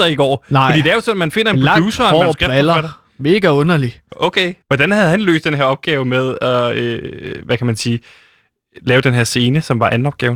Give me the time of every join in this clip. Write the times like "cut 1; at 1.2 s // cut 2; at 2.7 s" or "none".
cut 1; at 4.6 s